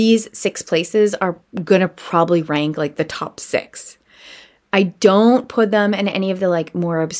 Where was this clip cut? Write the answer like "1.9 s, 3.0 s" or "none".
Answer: none